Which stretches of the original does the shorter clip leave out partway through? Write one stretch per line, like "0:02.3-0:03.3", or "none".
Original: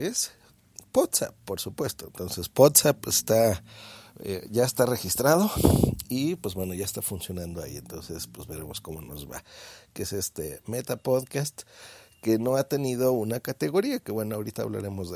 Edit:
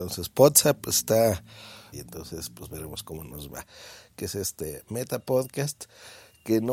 0:04.1-0:07.7